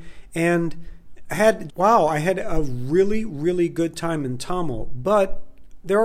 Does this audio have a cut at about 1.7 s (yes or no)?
yes